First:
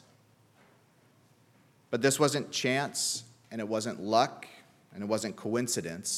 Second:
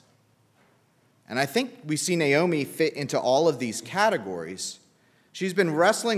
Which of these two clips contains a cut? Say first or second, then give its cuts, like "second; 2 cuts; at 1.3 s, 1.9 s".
second; 1 cut; at 1.2 s